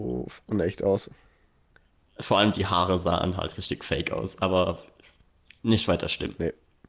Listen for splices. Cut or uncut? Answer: uncut